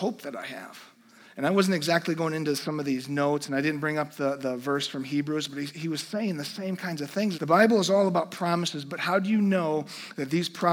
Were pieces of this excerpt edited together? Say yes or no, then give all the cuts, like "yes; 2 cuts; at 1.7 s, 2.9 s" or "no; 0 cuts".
yes; 1 cut; at 7.3 s